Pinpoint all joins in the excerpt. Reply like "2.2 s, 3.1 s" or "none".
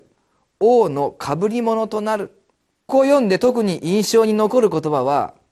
2.9 s